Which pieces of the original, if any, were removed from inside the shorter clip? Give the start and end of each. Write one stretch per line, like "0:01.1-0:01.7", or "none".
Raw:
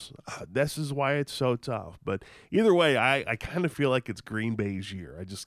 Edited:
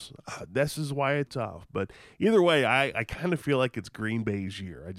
0:01.3-0:01.6